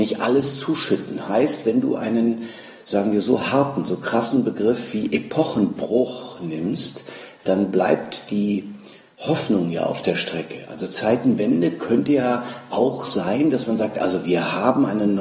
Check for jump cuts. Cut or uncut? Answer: uncut